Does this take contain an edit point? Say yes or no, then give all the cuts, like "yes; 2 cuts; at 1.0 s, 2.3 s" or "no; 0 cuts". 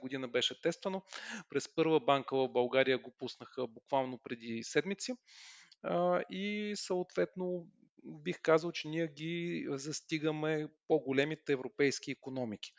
no; 0 cuts